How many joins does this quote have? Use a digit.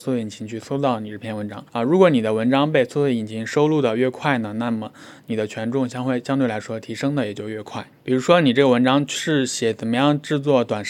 2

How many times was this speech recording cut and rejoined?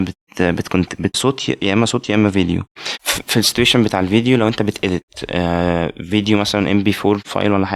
2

